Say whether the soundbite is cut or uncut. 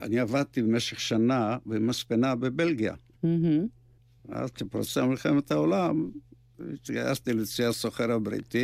uncut